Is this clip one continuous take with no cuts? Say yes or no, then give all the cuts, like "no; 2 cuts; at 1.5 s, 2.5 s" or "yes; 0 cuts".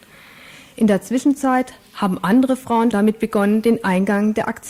no; 1 cut; at 2.9 s